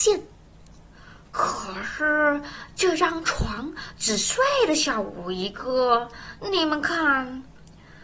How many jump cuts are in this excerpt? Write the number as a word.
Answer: zero